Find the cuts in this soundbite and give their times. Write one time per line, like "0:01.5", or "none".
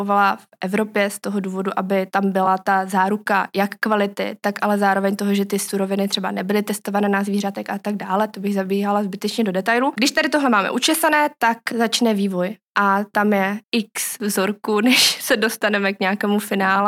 0:13.6